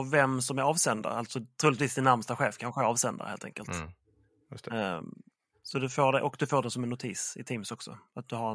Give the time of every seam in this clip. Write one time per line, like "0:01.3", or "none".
none